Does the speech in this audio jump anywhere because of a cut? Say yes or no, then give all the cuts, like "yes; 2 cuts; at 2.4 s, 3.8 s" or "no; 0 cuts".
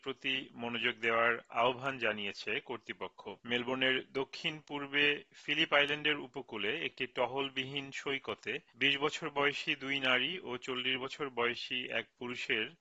yes; 1 cut; at 3.4 s